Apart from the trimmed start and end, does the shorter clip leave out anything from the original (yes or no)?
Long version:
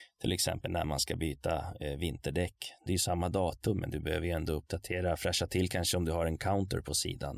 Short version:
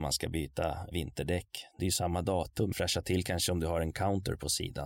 yes